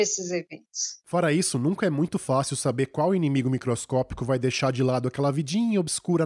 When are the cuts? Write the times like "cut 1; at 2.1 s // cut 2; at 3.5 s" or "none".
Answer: none